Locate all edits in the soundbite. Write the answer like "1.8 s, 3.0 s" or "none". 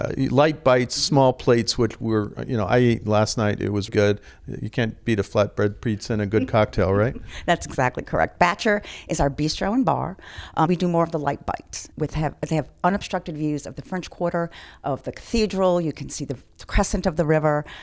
3.9 s, 10.7 s, 11.9 s